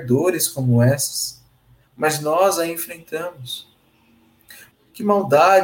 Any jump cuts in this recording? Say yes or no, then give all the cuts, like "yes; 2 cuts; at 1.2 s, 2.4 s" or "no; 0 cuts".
yes; 1 cut; at 4.7 s